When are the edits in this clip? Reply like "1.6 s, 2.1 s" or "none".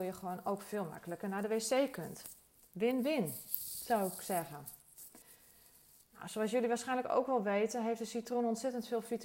none